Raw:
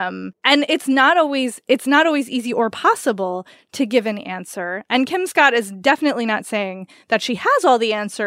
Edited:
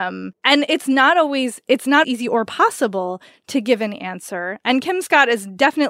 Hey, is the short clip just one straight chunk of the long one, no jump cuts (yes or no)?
no